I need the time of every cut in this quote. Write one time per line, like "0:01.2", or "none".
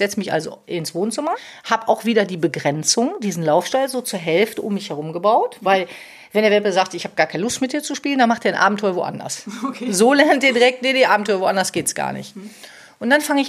none

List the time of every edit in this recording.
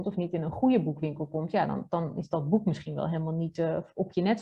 none

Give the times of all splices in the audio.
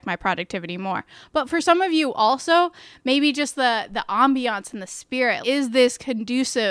0:05.4

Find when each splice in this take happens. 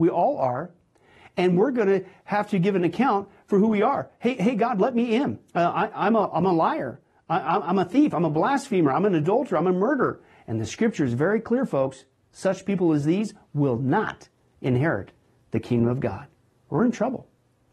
0:05.5

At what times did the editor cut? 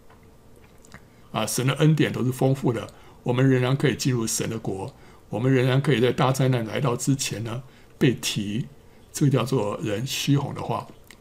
0:01.2

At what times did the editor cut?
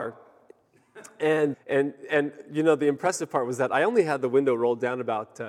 0:01.5

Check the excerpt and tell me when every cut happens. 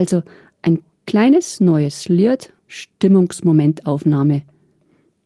0:02.6

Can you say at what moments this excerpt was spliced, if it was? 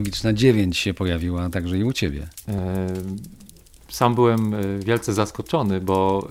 0:02.4

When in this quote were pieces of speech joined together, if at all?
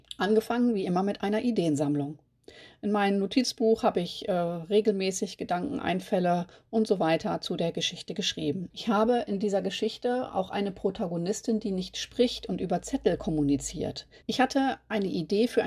0:08.7
0:14.2

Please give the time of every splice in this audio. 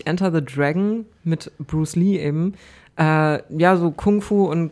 none

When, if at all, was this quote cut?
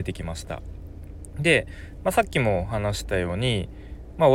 none

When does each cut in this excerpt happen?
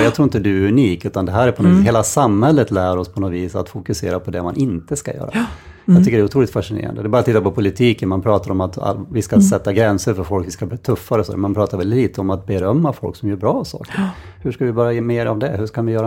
none

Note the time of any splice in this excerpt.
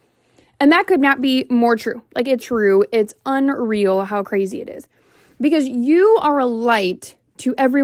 0:02.4

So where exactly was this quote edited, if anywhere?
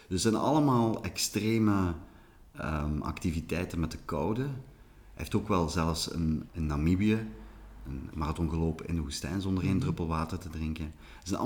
0:06.5
0:08.1

